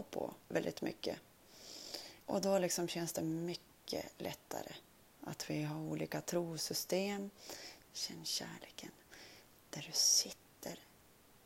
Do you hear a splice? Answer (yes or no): yes